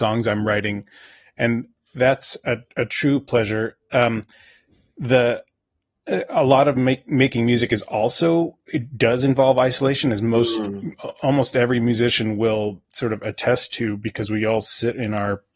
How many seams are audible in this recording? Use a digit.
0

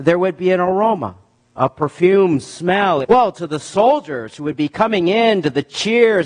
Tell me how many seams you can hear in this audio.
1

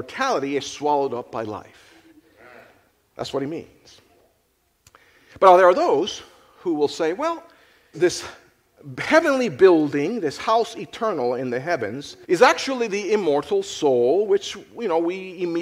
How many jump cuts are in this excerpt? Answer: 2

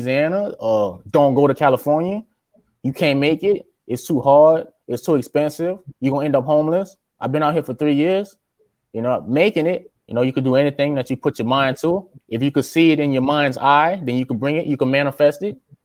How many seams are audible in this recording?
1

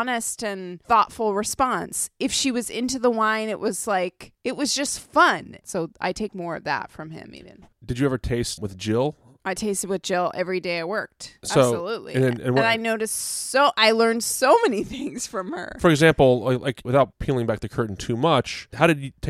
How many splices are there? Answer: 1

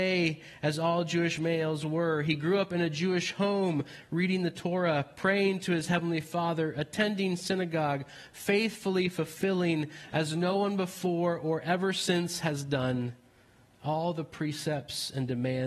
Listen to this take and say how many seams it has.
0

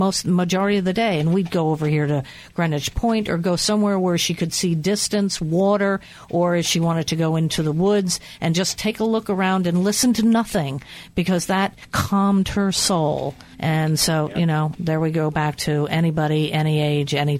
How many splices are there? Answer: 2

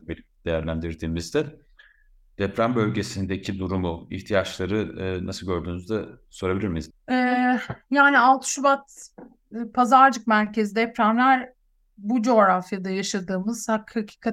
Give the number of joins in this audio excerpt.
1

